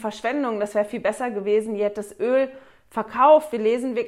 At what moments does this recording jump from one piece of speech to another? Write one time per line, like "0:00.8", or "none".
none